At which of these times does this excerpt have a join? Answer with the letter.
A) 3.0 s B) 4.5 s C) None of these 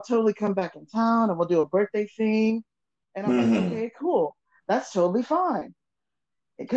C